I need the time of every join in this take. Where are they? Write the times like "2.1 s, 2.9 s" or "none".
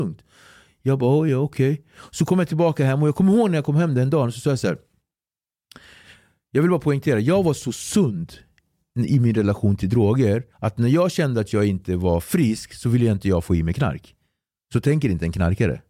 10.5 s